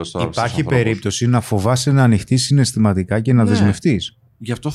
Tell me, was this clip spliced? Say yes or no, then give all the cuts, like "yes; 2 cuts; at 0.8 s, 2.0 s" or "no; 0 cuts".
no; 0 cuts